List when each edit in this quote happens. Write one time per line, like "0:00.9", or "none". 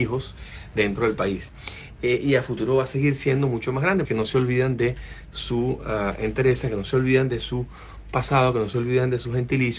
0:04.1